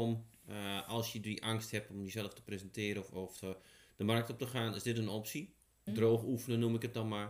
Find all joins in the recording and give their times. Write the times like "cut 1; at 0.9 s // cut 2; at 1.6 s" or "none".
cut 1; at 5.9 s

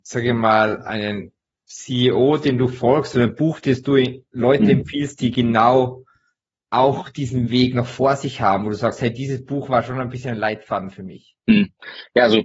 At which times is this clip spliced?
none

